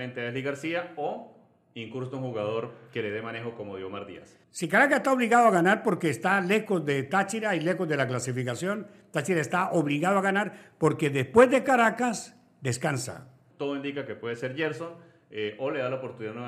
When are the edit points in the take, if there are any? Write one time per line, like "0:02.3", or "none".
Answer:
0:04.4
0:13.5